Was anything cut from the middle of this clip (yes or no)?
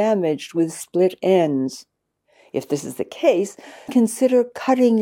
yes